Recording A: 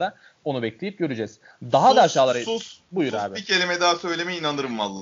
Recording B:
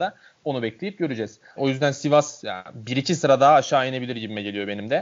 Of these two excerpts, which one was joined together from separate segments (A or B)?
B